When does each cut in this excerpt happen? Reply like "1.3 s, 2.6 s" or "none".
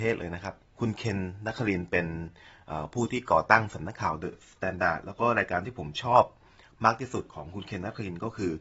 none

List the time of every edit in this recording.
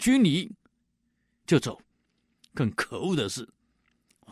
2.4 s

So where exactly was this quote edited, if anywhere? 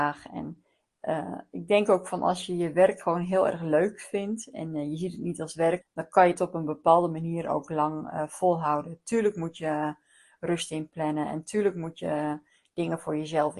5.8 s

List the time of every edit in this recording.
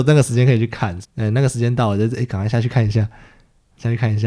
1.0 s

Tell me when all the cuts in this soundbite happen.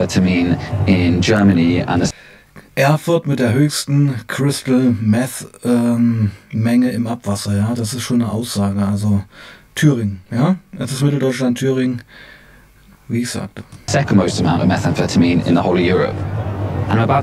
none

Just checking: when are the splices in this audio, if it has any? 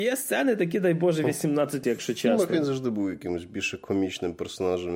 1.8 s

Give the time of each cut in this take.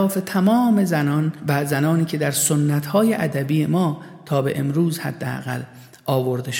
none

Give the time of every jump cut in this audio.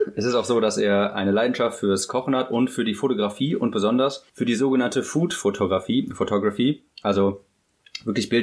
4.3 s

